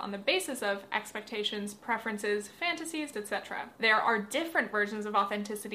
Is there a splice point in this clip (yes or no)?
yes